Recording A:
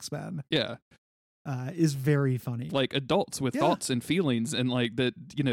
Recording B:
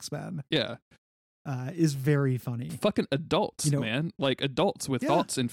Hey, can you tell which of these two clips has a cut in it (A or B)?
A